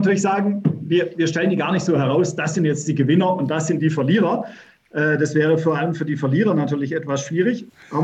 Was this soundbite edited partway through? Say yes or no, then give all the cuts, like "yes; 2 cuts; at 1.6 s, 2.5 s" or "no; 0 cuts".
no; 0 cuts